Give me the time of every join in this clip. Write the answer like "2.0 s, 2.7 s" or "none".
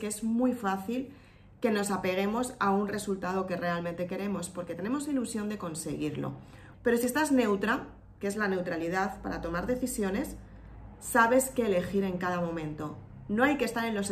6.7 s